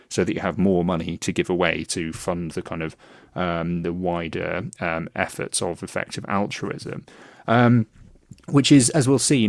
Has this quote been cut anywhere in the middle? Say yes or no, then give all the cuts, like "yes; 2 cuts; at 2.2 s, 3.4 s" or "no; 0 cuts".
no; 0 cuts